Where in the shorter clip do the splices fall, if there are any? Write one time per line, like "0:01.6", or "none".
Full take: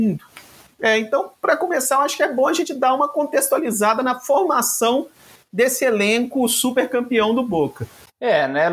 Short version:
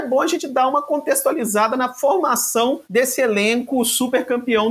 0:02.8